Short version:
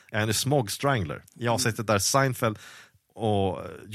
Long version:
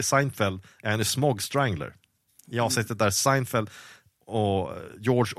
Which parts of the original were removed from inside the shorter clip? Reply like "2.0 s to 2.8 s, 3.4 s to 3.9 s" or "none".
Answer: 2.0 s to 2.4 s